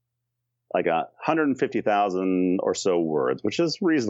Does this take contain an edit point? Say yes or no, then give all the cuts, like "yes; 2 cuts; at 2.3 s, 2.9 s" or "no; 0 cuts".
no; 0 cuts